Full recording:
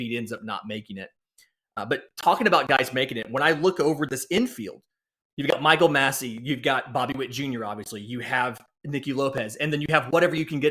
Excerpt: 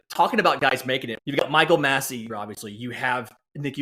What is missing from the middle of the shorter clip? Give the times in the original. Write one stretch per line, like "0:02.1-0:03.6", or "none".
0:03.2-0:05.3
0:06.4-0:07.6